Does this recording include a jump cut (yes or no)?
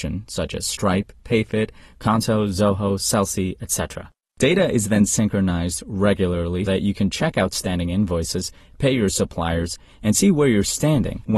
yes